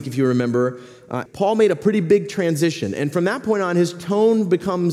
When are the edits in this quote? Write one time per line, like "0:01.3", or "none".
0:01.3